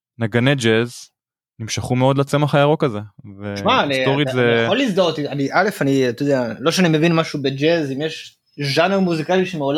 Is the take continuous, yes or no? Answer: yes